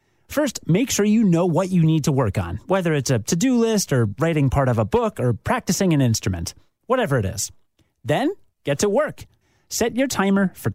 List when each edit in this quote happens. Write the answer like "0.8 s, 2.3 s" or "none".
none